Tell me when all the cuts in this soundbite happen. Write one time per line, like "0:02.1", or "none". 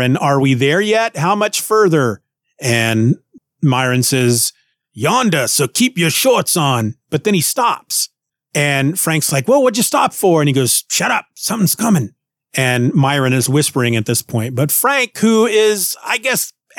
none